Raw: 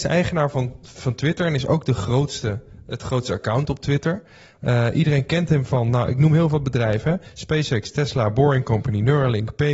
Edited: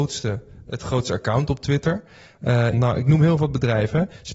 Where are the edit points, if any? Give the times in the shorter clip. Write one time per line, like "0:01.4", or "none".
0:02.7